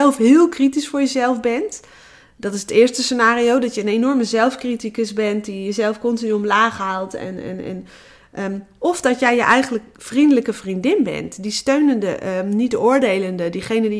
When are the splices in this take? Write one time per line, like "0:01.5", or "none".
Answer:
none

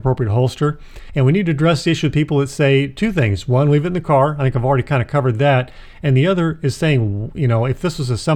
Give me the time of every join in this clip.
none

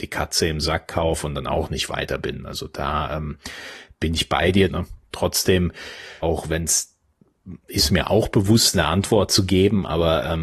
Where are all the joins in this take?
0:04.7
0:06.2
0:08.7

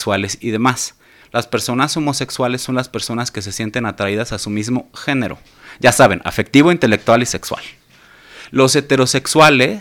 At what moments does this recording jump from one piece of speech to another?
0:01.2

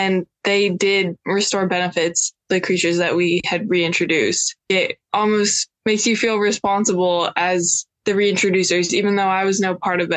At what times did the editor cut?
0:02.4

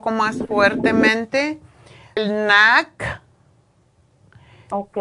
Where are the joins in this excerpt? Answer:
0:02.2

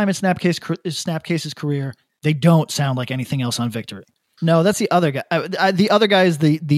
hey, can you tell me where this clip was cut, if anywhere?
0:04.4

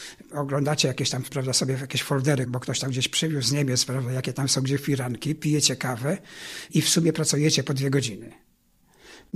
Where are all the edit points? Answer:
0:03.4

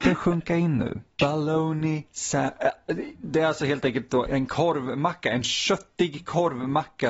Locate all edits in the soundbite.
0:01.2
0:04.3

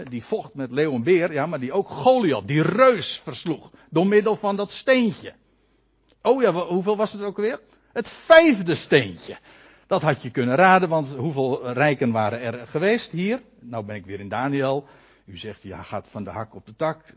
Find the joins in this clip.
none

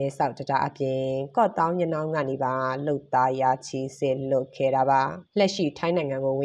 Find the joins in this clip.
0:05.3

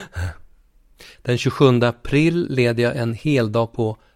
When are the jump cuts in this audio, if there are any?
0:01.1

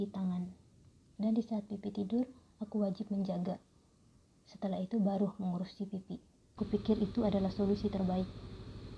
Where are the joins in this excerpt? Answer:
0:01.1
0:04.4
0:06.6

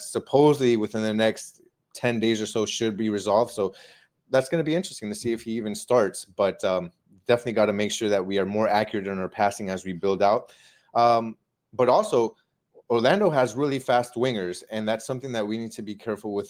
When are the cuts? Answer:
none

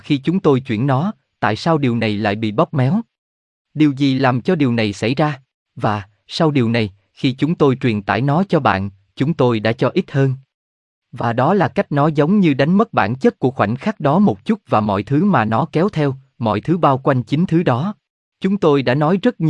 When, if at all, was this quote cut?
0:05.6
0:18.3

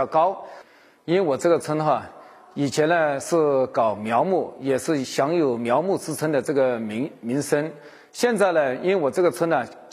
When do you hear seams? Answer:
none

